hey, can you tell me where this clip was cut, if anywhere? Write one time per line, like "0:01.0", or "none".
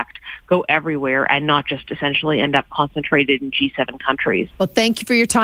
0:04.5